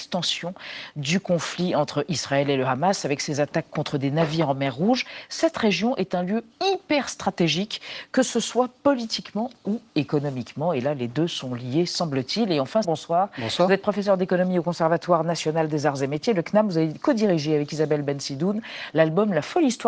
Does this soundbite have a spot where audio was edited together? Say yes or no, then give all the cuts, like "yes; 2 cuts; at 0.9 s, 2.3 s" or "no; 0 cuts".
yes; 1 cut; at 12.8 s